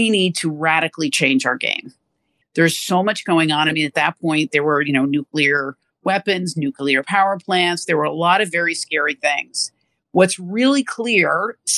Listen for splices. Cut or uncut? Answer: cut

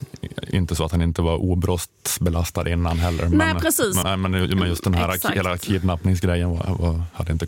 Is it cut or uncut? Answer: cut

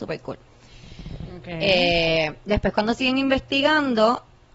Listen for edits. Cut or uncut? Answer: uncut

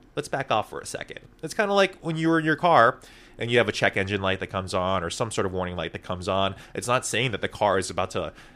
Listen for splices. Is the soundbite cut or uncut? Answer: uncut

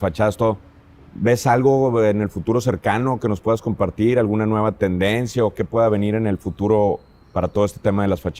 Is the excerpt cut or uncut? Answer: uncut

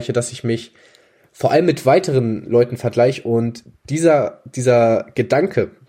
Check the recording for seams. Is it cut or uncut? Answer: uncut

